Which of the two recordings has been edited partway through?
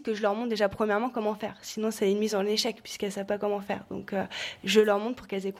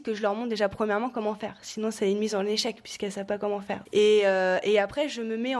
second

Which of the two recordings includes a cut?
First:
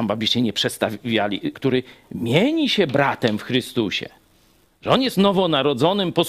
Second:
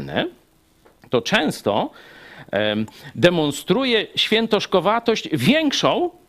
first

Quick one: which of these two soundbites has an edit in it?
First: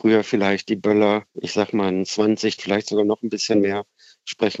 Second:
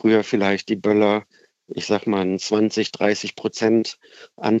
first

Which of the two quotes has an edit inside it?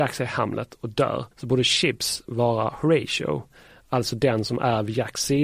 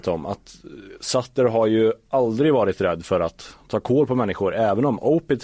first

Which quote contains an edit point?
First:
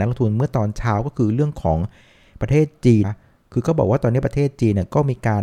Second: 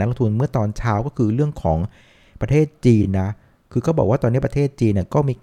first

